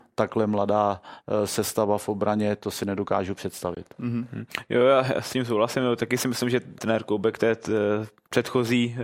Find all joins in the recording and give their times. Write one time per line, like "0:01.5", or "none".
0:06.8